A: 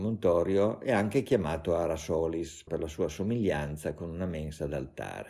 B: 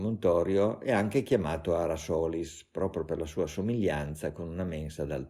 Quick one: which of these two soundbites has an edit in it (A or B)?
A